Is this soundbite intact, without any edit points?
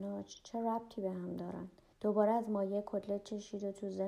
no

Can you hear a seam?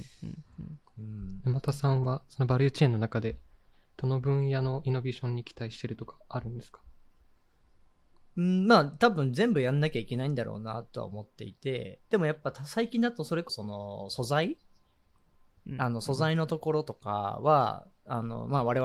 yes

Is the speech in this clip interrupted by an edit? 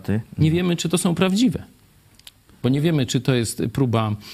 no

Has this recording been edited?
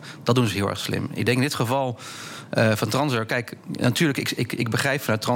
no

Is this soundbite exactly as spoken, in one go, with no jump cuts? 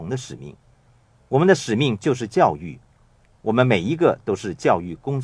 yes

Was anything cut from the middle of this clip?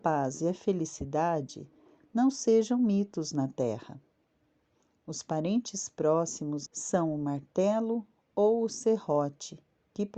yes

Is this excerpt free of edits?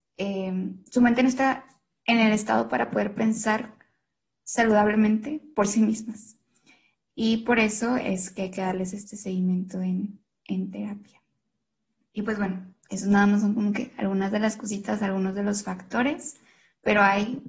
yes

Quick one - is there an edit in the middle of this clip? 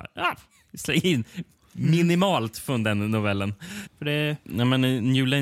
yes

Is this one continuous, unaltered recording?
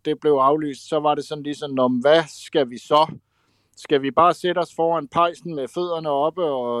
yes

